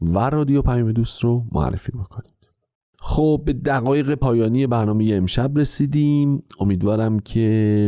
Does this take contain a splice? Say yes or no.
no